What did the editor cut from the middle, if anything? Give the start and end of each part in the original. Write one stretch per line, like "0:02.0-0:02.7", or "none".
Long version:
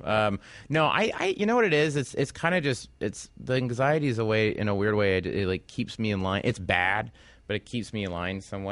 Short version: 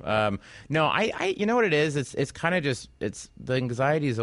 none